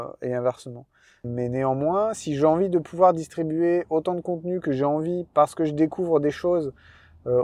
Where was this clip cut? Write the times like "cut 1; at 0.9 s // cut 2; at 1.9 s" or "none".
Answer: cut 1; at 1.2 s